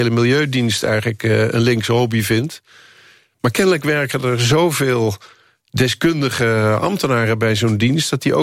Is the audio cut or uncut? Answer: uncut